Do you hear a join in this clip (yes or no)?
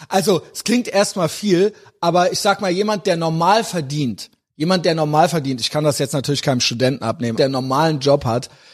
yes